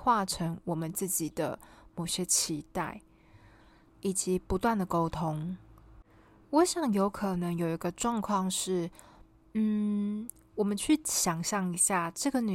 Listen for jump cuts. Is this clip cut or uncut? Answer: cut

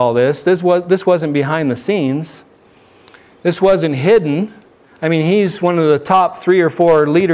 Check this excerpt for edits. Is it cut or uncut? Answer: uncut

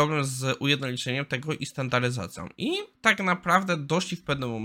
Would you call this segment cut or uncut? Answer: uncut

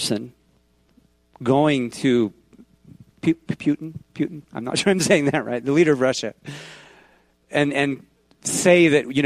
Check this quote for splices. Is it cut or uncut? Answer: uncut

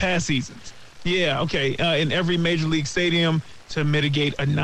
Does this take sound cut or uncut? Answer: cut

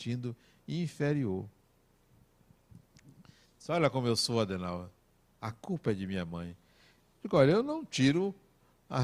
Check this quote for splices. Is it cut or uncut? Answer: uncut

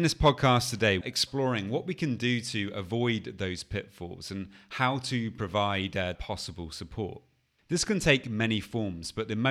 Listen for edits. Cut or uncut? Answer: cut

